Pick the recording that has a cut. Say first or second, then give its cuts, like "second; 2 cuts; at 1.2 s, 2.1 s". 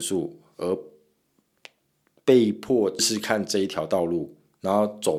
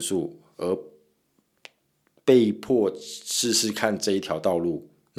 first; 1 cut; at 3.0 s